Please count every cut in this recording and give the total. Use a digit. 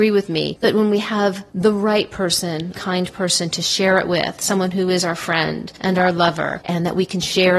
1